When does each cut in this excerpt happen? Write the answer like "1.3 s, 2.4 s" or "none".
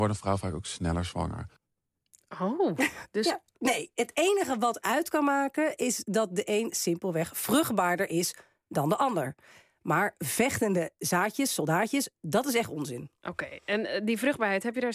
3.5 s

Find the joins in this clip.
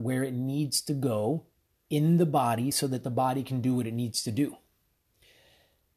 none

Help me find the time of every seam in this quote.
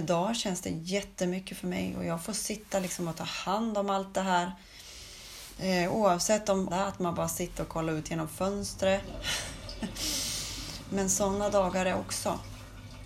6.7 s

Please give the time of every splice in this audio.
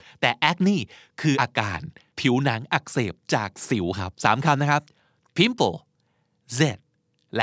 1.3 s, 4.1 s

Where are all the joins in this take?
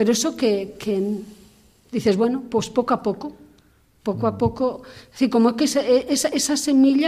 none

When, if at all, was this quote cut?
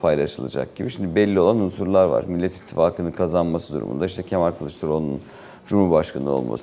none

